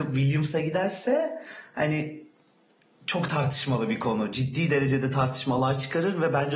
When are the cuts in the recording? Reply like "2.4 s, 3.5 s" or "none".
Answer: none